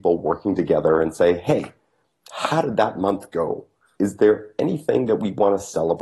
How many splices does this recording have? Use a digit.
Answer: 1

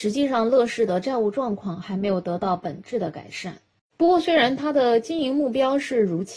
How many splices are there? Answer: 1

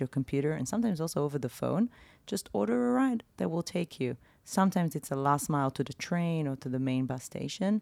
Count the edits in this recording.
0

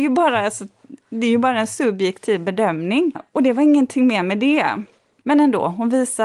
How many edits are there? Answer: 2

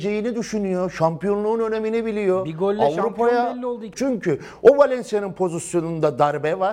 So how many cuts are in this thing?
1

